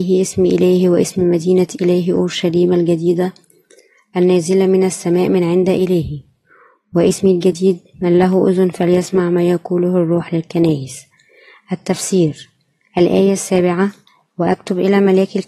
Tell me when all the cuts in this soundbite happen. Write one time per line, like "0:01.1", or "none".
none